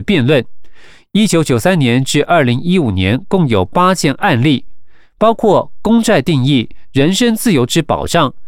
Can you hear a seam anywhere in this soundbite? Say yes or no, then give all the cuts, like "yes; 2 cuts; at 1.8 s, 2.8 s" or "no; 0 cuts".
no; 0 cuts